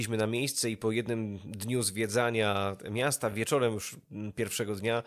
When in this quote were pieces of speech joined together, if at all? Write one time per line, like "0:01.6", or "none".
none